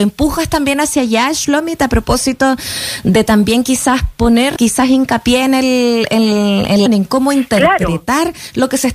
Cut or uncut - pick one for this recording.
cut